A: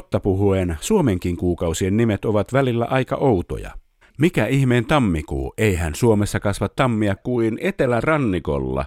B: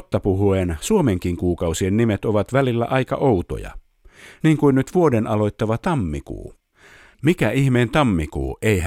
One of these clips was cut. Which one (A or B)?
A